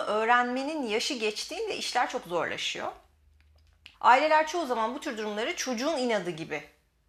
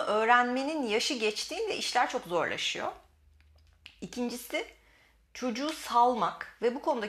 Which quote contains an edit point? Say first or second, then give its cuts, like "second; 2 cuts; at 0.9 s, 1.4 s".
first; 1 cut; at 3.9 s